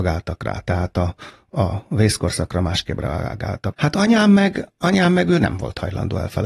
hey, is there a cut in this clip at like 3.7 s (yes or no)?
yes